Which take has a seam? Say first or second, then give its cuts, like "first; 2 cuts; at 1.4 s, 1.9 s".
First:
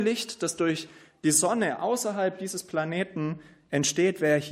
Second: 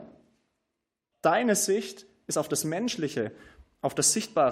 second; 1 cut; at 1.1 s